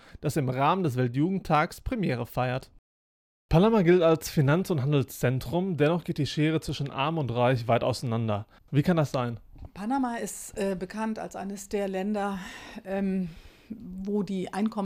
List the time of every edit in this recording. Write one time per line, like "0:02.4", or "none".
none